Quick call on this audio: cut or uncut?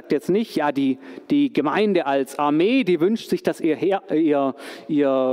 uncut